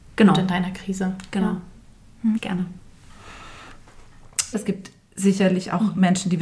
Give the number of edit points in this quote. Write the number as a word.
two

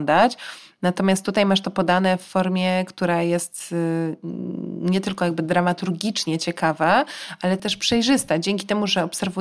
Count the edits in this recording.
one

